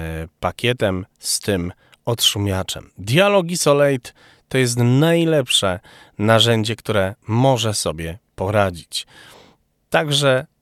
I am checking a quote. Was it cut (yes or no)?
no